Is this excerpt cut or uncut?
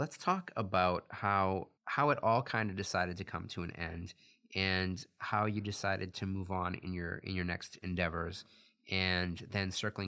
cut